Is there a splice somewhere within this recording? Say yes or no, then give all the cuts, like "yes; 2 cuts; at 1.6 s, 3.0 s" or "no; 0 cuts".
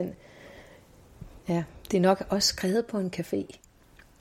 no; 0 cuts